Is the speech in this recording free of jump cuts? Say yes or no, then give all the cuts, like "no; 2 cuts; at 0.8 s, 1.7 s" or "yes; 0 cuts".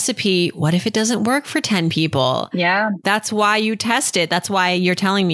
yes; 0 cuts